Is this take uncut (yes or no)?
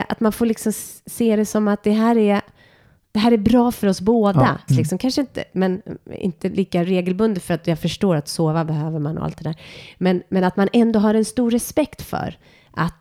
no